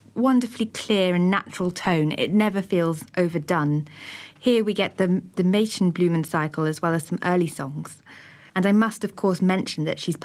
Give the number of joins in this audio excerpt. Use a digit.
1